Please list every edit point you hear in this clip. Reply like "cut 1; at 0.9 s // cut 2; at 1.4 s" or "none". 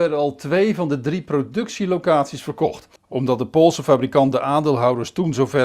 cut 1; at 3.0 s